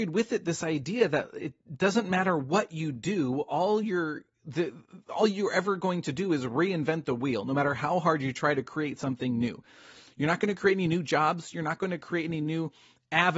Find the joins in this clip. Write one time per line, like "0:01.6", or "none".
none